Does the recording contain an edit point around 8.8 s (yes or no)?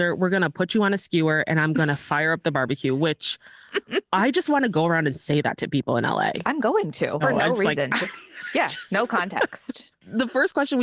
no